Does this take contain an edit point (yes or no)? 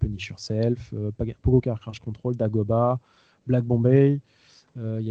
no